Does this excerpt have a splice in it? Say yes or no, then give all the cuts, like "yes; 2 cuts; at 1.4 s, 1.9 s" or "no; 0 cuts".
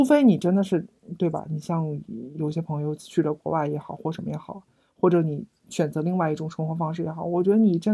no; 0 cuts